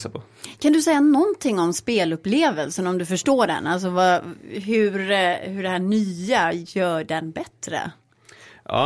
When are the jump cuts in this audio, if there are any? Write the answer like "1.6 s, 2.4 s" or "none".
none